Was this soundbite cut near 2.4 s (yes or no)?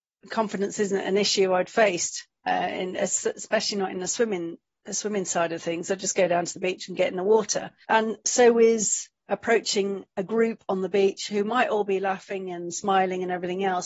no